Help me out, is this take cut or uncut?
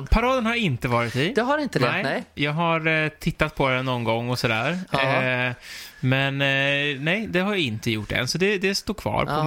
uncut